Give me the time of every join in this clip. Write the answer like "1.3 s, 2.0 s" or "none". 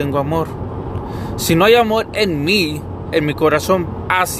3.1 s

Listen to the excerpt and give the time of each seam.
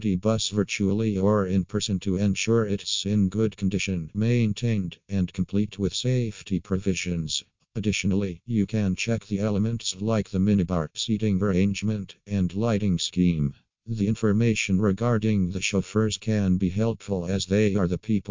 4.1 s

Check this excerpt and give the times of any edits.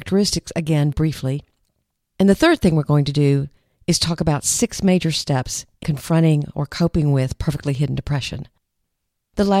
0.9 s, 5.8 s

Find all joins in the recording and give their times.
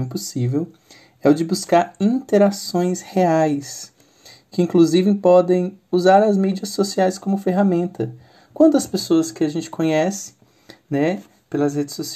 none

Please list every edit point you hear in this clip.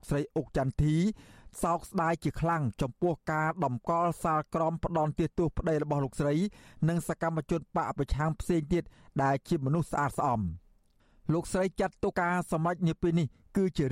12.1 s

